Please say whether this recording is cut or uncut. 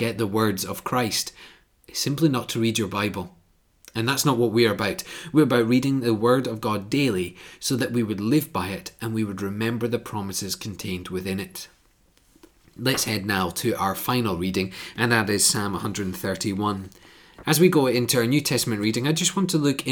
cut